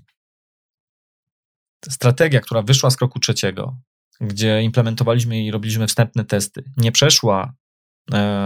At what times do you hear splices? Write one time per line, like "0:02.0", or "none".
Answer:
none